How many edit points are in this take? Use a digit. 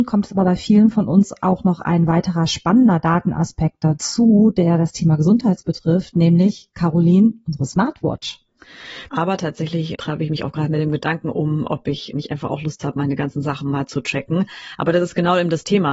1